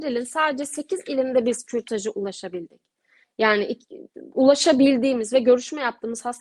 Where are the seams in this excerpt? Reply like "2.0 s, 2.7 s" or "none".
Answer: none